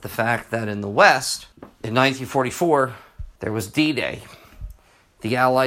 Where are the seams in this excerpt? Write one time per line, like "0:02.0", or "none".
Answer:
0:01.5
0:03.4